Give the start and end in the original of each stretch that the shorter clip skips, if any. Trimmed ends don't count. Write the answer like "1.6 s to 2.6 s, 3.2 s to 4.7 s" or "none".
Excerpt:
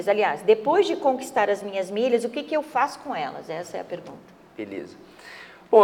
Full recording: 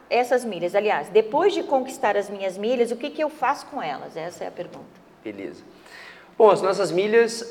none